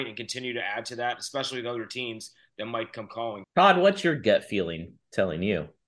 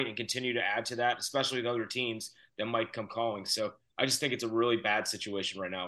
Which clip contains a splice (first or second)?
first